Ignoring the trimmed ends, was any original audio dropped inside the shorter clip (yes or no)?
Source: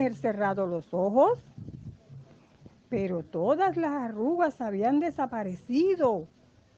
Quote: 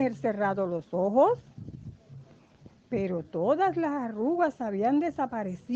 no